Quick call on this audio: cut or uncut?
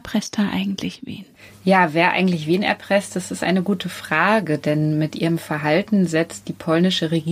uncut